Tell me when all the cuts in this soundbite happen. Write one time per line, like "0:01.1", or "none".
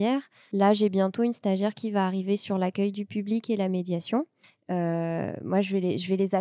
0:04.5